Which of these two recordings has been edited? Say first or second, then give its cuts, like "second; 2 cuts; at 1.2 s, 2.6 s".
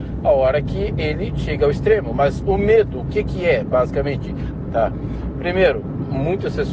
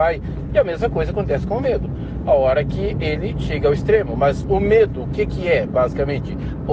first; 1 cut; at 4.6 s